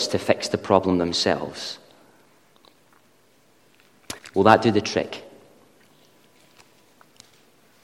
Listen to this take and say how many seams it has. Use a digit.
1